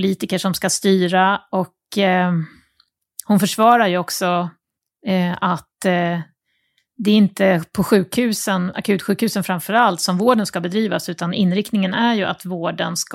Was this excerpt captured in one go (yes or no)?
yes